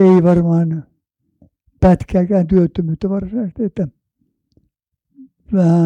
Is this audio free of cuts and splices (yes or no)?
yes